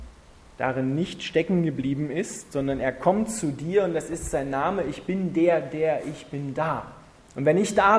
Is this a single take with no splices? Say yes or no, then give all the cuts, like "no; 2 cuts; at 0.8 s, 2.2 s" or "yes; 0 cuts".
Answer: yes; 0 cuts